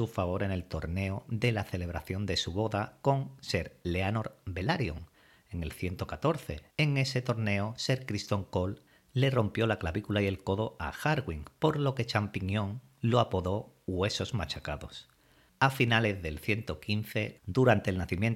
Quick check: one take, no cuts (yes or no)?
no